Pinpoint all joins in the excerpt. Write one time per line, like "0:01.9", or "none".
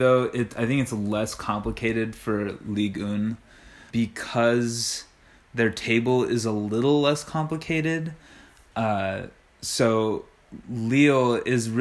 0:03.9